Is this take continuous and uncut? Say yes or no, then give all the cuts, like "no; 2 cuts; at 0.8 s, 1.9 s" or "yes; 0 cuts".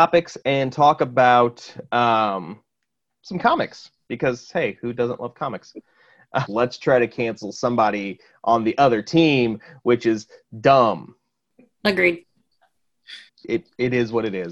no; 2 cuts; at 6.5 s, 13.3 s